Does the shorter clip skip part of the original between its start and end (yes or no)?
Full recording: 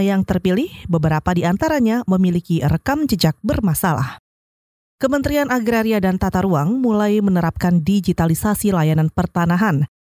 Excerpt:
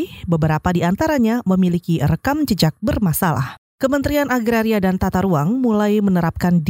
yes